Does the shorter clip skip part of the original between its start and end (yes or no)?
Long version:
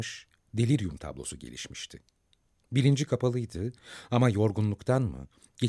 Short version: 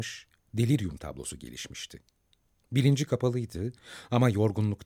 no